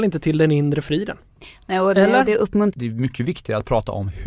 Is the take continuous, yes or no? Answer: no